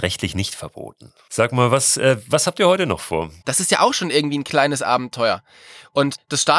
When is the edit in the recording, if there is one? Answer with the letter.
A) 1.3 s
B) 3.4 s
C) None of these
B